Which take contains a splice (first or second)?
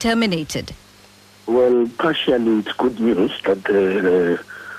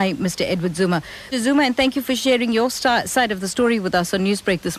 second